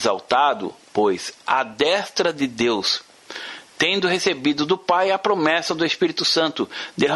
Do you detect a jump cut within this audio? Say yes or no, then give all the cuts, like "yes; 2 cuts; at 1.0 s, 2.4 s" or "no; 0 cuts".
no; 0 cuts